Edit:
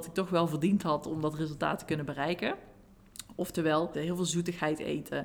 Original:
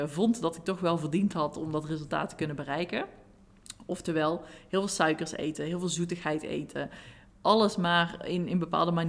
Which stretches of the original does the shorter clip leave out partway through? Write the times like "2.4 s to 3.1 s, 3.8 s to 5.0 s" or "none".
4.4 s to 5.6 s